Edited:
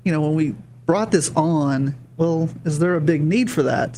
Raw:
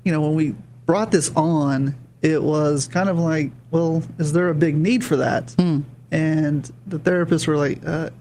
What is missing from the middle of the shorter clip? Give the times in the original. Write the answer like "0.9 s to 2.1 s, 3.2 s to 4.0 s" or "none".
2.1 s to 3.6 s